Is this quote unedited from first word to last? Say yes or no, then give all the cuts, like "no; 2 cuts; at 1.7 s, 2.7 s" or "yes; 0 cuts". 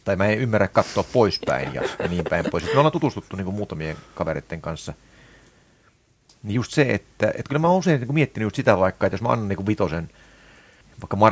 yes; 0 cuts